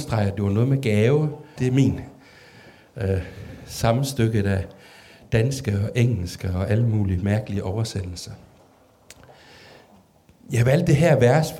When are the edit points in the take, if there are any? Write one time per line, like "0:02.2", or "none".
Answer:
0:01.6